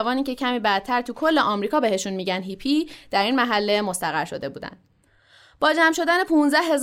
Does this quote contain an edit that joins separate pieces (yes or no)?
no